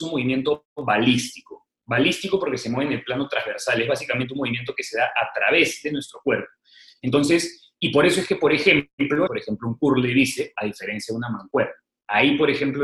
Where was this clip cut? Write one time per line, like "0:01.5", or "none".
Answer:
0:09.3